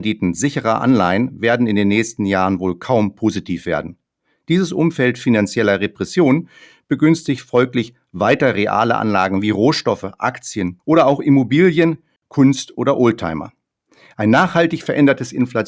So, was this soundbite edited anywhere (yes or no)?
no